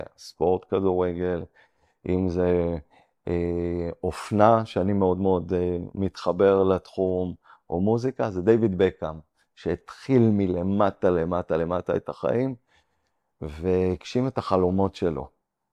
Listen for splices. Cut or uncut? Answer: uncut